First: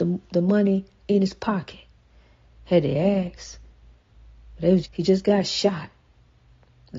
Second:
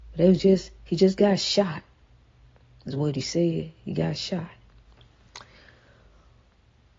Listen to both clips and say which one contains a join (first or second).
first